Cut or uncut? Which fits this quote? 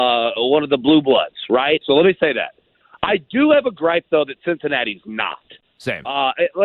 cut